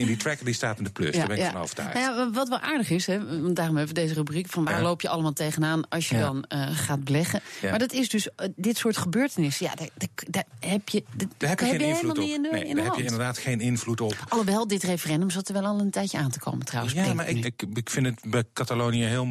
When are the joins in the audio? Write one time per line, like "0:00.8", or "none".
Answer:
0:17.4